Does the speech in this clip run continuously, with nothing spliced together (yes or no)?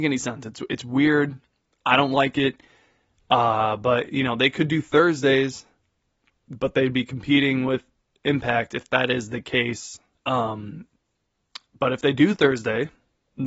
no